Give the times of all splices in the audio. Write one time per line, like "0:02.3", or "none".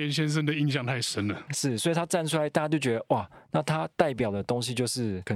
none

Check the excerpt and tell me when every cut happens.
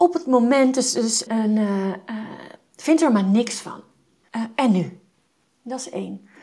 0:01.3
0:04.2

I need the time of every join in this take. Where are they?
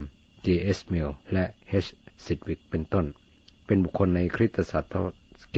0:01.2

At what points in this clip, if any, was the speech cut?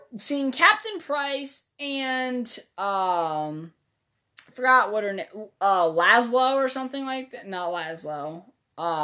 none

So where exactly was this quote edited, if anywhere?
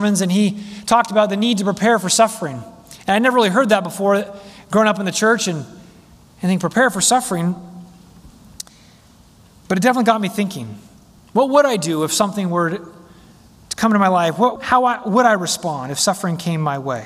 0:14.6

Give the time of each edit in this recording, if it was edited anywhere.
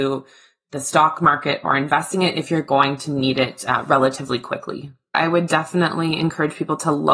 none

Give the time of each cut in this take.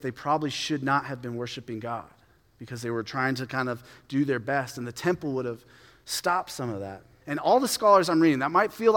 0:07.2

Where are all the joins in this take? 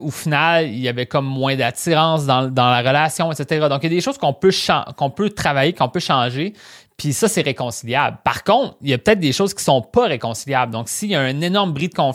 none

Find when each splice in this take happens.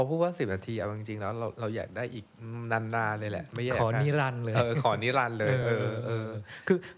none

